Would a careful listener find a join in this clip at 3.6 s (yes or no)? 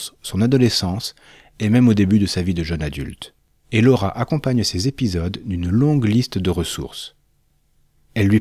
yes